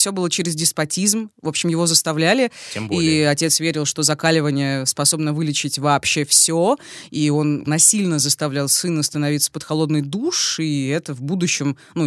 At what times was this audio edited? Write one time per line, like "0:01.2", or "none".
0:07.7